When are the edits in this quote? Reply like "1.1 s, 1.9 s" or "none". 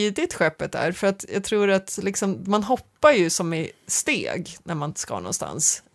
none